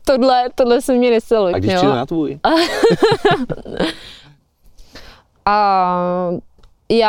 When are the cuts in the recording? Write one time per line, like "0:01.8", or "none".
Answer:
0:01.5